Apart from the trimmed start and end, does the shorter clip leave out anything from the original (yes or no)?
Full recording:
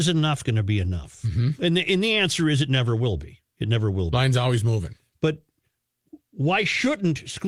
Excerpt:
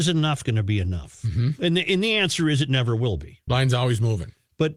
yes